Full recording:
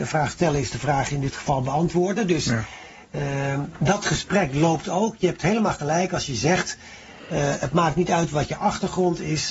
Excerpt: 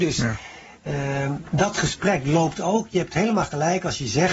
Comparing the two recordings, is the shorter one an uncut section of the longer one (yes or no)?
yes